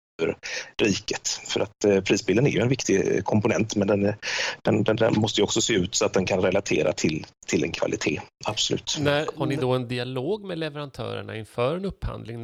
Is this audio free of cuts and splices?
yes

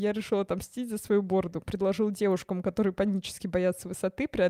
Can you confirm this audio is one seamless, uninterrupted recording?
yes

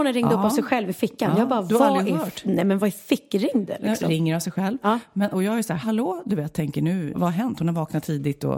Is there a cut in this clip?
yes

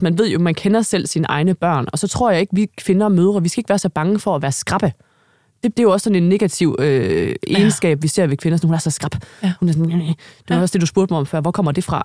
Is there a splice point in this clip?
no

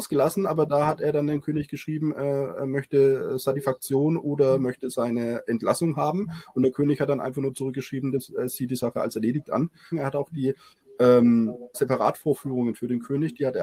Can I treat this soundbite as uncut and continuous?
no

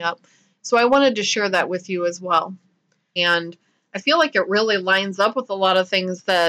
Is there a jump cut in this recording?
yes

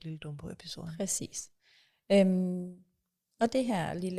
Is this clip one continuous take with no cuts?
yes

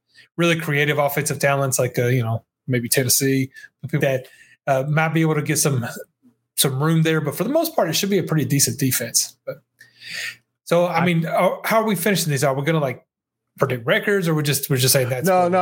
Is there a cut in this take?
yes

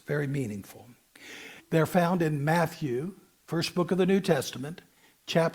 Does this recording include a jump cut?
yes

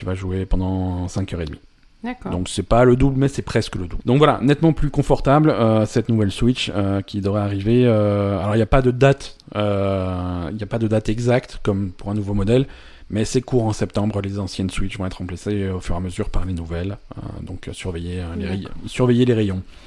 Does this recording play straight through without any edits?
no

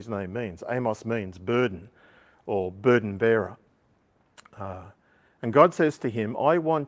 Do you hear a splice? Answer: no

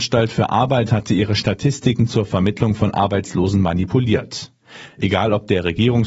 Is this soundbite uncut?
no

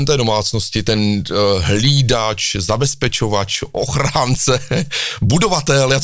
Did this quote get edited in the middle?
no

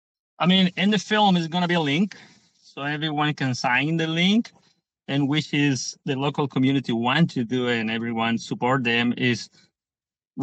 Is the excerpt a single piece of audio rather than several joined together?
yes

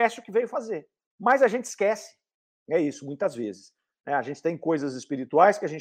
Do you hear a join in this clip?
yes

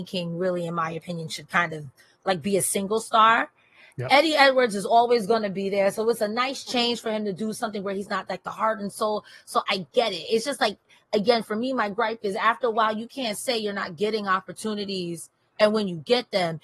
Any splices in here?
no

